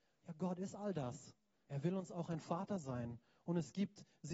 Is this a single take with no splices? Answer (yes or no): no